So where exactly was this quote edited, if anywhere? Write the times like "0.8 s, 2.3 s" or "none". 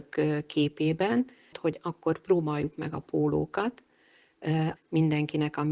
1.5 s, 4.8 s